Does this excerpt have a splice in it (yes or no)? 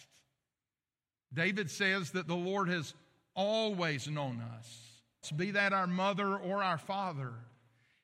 yes